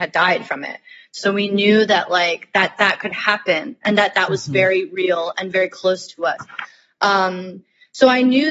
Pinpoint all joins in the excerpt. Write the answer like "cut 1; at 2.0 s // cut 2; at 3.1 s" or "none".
none